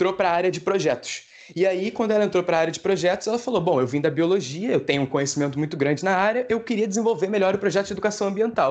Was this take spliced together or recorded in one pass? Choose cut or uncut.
uncut